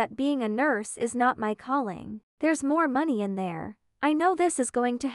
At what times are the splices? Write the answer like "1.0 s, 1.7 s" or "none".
2.3 s